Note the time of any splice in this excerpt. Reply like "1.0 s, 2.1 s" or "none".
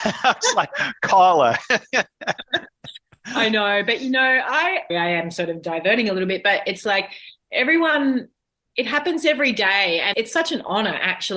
4.9 s, 10.1 s